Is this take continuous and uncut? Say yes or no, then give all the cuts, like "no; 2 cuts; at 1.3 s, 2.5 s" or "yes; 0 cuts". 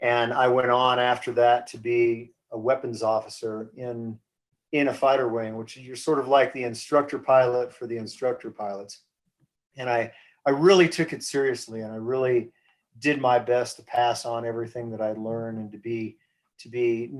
yes; 0 cuts